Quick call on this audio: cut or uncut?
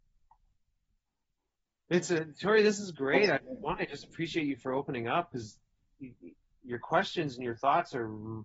uncut